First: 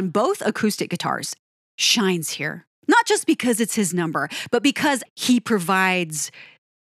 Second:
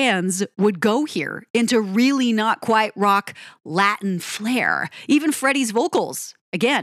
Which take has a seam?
first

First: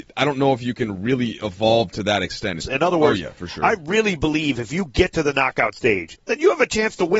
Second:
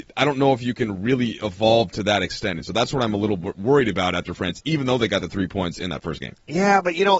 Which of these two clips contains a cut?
first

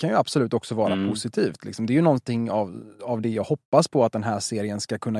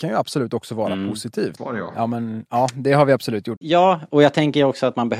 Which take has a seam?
second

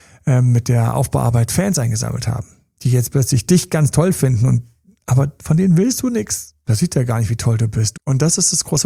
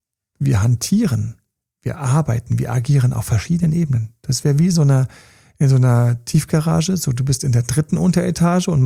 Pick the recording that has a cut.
first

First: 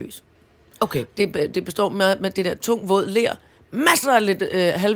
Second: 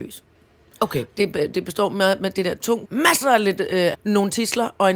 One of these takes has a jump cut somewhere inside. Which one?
second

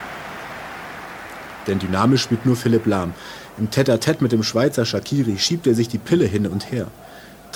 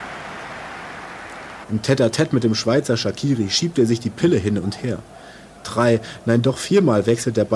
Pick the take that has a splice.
second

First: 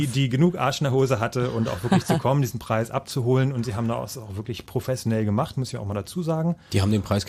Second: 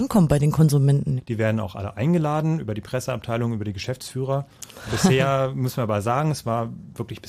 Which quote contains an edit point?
second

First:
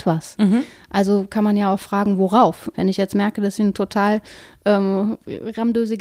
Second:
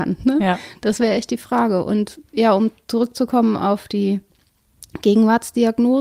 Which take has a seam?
first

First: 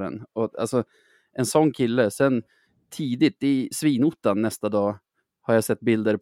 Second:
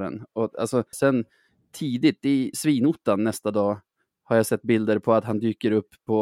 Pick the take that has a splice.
second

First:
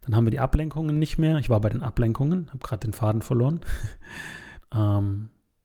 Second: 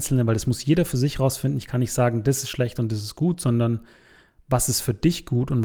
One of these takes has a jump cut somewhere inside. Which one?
first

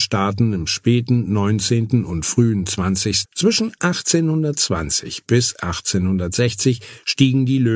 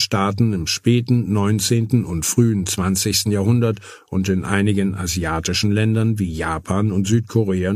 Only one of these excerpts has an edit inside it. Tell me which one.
first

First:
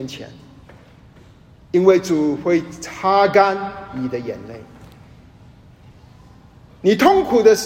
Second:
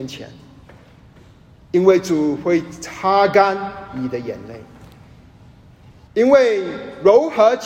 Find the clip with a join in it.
second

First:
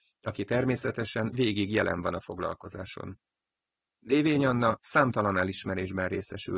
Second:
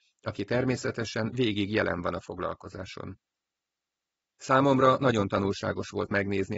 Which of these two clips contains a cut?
first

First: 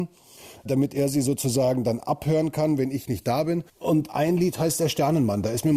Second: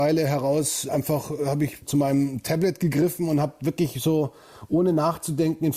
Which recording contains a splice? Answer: first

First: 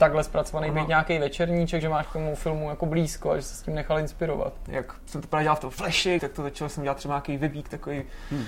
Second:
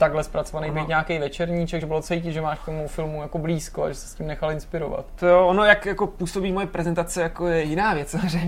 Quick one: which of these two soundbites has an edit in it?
first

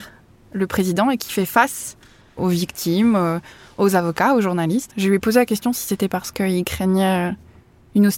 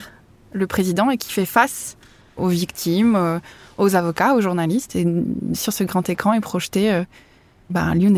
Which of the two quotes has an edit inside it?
first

